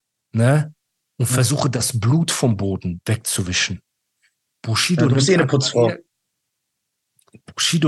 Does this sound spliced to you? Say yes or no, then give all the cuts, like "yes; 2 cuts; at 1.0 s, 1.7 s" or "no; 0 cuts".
no; 0 cuts